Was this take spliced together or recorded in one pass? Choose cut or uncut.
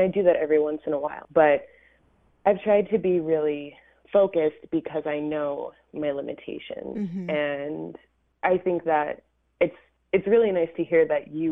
cut